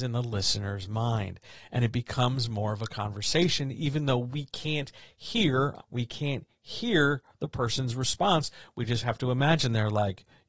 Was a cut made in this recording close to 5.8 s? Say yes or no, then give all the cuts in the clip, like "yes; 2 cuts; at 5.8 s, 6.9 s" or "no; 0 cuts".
yes; 1 cut; at 5.8 s